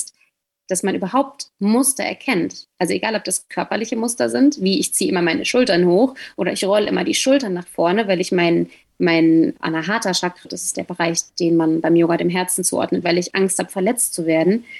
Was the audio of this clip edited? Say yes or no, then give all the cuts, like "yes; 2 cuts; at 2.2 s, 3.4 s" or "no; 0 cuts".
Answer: yes; 2 cuts; at 10.4 s, 13.0 s